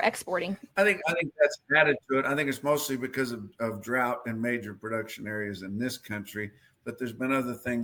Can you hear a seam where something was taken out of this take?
no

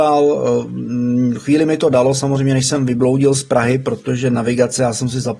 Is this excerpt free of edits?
yes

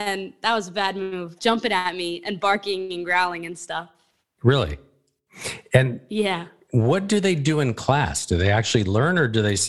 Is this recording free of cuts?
no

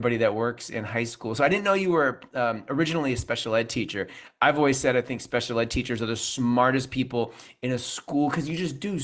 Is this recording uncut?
yes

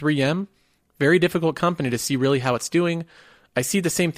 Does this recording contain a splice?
no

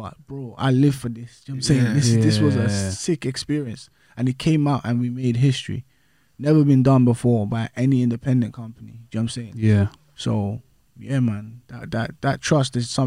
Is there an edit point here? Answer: no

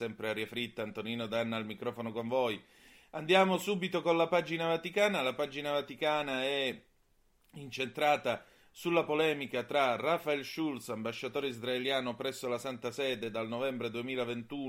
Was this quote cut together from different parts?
no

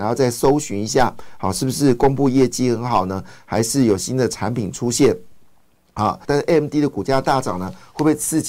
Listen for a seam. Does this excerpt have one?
yes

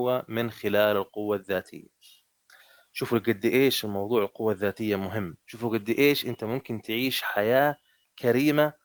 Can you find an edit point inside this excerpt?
yes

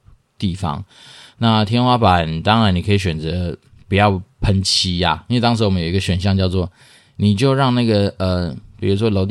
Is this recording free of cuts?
yes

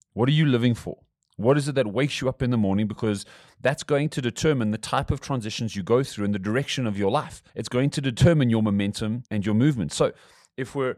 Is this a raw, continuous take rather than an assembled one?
no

